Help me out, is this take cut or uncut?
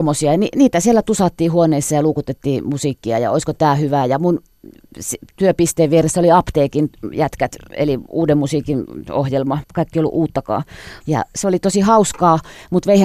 cut